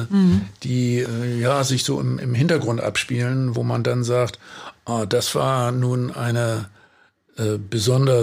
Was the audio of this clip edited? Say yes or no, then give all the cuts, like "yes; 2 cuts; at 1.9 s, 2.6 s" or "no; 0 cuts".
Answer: no; 0 cuts